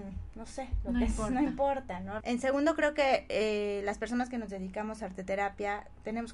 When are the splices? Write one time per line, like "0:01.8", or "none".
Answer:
0:02.2